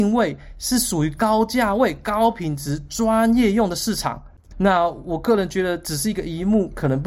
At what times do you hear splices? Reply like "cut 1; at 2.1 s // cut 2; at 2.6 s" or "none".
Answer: cut 1; at 4.5 s